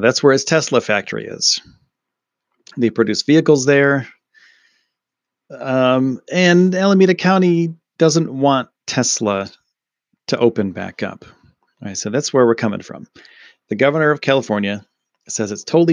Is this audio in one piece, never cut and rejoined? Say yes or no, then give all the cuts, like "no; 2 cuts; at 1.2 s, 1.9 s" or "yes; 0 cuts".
no; 1 cut; at 11.7 s